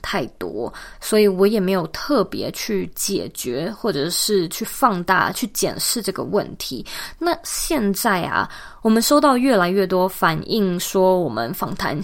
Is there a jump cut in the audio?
no; 0 cuts

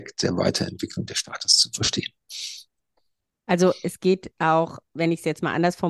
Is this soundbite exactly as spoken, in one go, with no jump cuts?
yes; 0 cuts

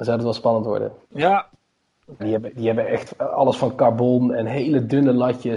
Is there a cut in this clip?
yes; 2 cuts; at 1.0 s, 2.2 s

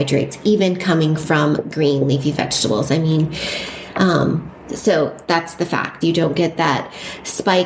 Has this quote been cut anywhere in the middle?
yes; 1 cut; at 6.0 s

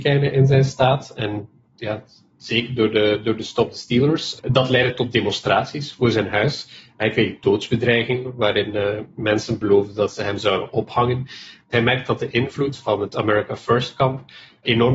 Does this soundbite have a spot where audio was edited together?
no; 0 cuts

